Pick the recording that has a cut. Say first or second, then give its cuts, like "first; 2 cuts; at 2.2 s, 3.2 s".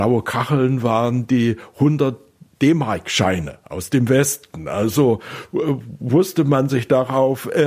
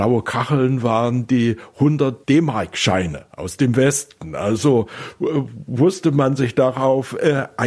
second; 1 cut; at 2.2 s